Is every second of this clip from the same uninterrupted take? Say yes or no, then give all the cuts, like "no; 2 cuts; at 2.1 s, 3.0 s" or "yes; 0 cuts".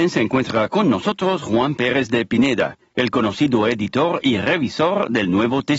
yes; 0 cuts